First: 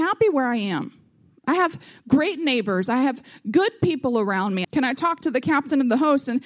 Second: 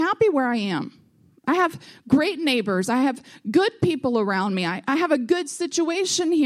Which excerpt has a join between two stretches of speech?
first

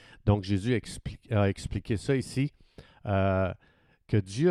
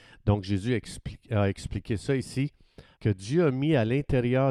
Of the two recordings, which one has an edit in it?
second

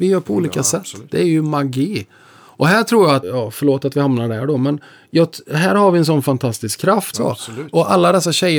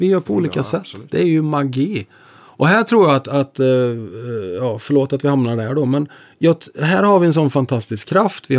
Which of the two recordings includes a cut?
first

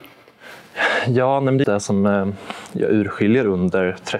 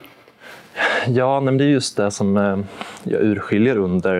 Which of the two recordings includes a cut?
first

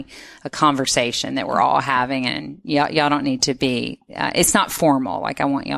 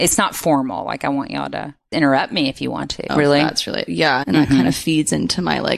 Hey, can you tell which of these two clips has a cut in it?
second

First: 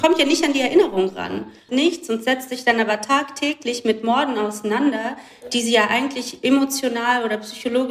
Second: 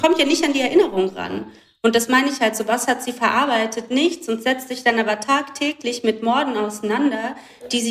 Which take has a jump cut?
first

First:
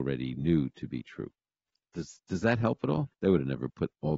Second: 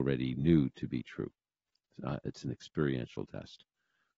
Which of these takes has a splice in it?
first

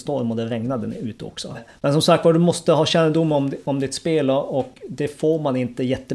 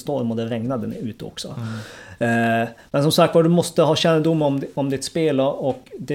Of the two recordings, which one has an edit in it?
first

